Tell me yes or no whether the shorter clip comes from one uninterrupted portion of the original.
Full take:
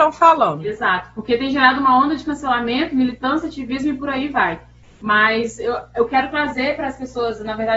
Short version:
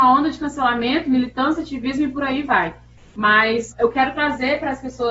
no